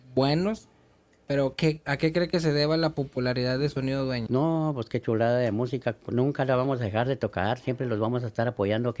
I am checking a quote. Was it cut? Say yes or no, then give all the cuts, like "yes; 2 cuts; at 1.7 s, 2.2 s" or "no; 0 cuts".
yes; 1 cut; at 4.3 s